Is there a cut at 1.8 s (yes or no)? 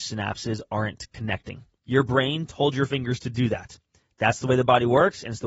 yes